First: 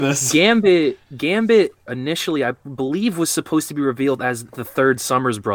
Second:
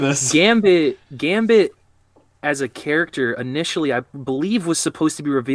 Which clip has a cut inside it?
first; 1 cut; at 1.9 s

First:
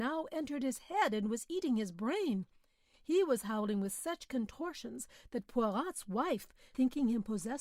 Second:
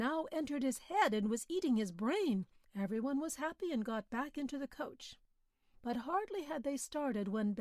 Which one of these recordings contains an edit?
second; 1 cut; at 2.6 s

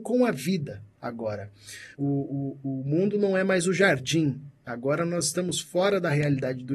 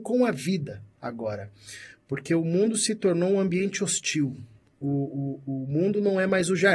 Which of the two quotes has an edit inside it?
first; 1 cut; at 1.9 s

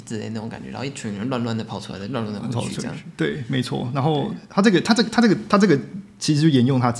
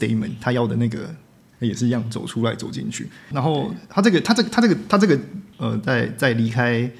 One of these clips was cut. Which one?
second; 3 cuts; at 1.5 s, 3.3 s, 5.5 s

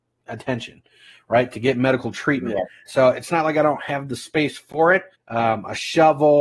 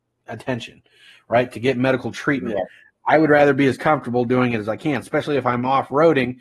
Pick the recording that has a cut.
first; 2 cuts; at 2.9 s, 5.1 s

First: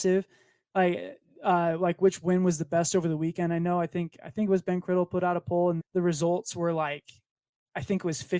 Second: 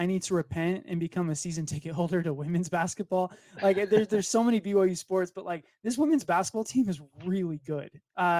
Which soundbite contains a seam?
first; 1 cut; at 5.8 s

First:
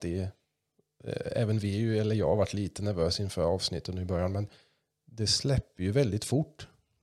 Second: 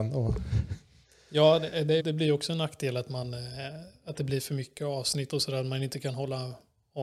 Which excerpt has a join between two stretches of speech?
second; 1 cut; at 2.0 s

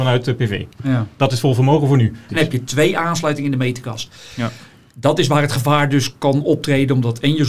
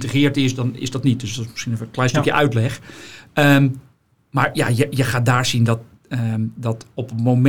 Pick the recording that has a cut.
first; 1 cut; at 2.3 s

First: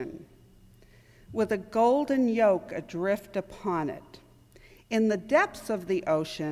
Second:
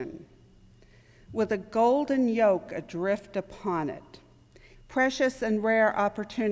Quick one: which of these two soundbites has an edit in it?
second; 1 cut; at 4.7 s

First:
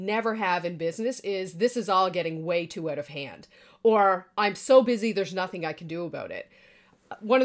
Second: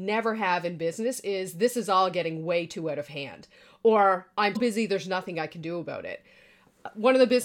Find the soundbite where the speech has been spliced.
second; 1 cut; at 4.6 s

